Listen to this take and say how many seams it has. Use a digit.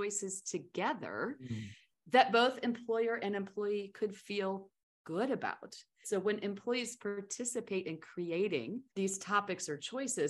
2